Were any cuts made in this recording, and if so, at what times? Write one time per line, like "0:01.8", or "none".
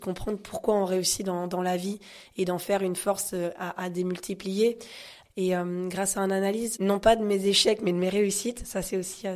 0:05.3
0:06.8